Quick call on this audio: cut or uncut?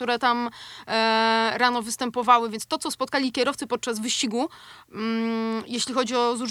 uncut